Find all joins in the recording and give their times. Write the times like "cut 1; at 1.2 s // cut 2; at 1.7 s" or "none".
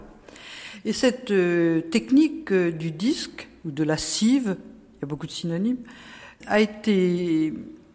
cut 1; at 6.4 s